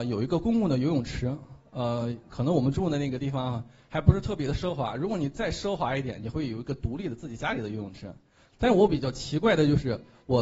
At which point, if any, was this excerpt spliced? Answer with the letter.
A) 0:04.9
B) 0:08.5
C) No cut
B